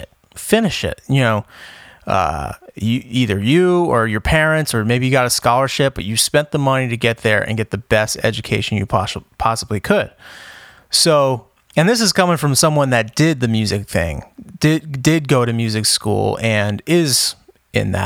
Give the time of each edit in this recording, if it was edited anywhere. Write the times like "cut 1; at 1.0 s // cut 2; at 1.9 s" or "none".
none